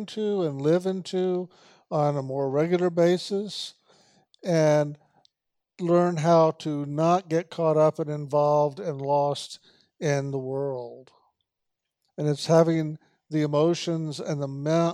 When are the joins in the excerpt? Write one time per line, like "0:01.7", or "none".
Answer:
0:12.1